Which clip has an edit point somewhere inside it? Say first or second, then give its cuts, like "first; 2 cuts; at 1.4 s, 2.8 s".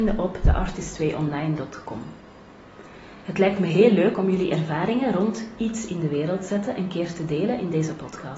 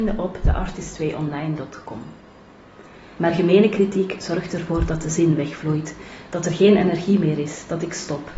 second; 1 cut; at 3.2 s